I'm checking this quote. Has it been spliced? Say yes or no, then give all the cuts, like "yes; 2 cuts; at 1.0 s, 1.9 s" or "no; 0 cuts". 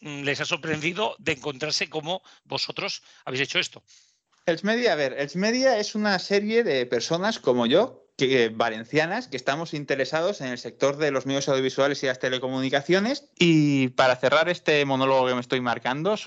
yes; 1 cut; at 13.3 s